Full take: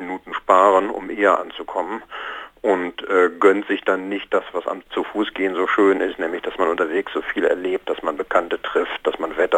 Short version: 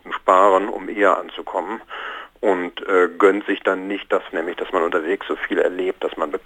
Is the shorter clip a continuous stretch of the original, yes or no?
no